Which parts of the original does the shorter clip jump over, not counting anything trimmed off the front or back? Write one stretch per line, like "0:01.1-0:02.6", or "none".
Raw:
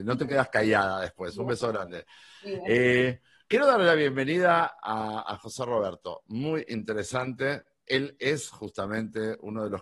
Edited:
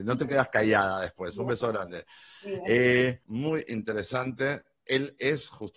0:03.2-0:06.2

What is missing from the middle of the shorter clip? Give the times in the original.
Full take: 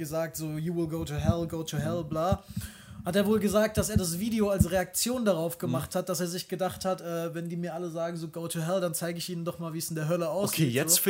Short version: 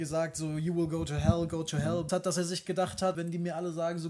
0:02.1-0:05.9
0:07.0-0:07.3

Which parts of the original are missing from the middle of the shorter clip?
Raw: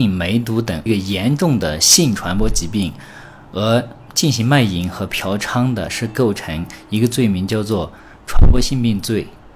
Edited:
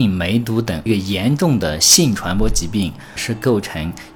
0:03.2-0:05.9

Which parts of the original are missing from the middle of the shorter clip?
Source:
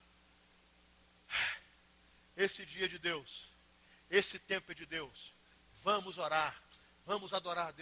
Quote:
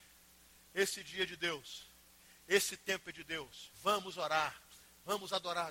0:05.4-0:05.7

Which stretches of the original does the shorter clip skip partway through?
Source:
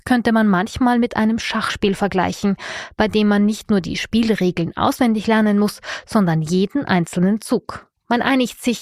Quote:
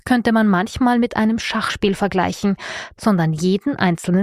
0:03.0-0:06.0

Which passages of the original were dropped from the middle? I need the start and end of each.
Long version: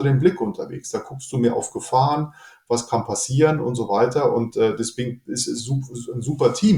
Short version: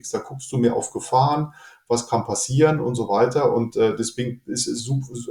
none

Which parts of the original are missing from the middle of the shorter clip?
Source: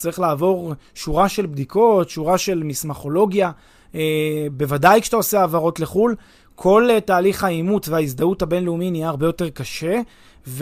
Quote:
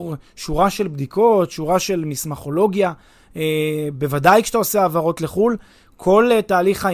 none

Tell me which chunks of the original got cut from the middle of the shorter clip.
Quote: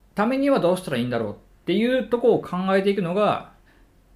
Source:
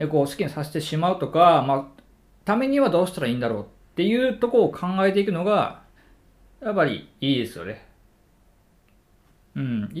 none

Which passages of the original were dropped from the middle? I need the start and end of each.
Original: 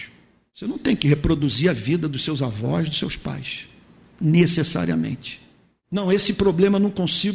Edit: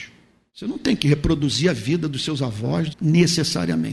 0:02.9-0:04.1

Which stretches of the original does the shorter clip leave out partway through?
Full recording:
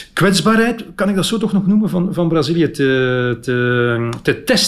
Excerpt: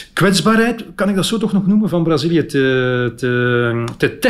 0:01.9-0:02.1

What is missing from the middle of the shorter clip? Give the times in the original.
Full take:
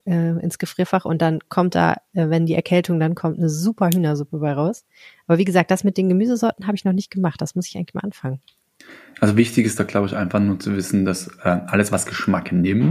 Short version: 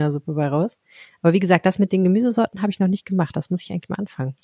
none

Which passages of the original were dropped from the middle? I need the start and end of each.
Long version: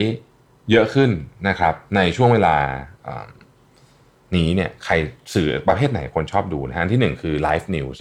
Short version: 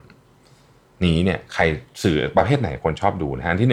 none

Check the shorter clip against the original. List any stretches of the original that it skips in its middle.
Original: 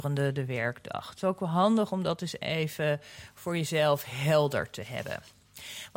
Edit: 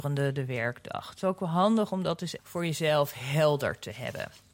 0:02.4-0:03.3

